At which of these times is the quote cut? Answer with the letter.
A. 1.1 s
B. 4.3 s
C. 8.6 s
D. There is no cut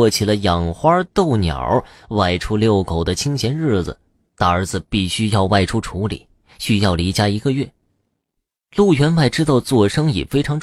B